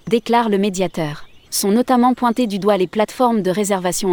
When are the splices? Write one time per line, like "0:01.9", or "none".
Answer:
0:01.4